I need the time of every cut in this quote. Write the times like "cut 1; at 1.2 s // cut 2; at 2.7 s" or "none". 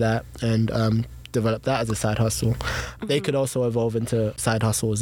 cut 1; at 3.0 s